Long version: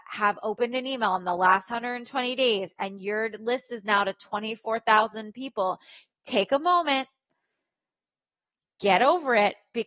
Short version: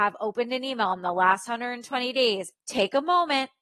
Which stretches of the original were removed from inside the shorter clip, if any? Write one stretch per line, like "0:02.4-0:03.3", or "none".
0:02.8-0:06.1